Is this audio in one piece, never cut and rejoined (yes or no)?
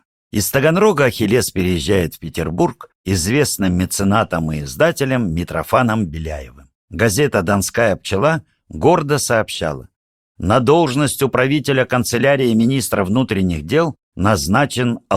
no